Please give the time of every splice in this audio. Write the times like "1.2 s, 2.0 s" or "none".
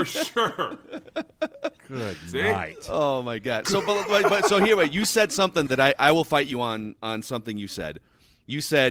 5.7 s